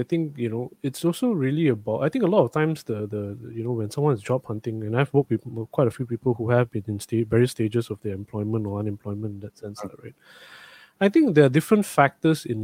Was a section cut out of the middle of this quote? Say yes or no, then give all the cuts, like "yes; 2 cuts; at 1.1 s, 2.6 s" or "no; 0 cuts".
no; 0 cuts